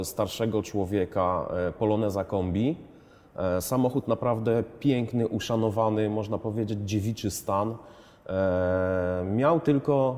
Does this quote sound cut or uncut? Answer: uncut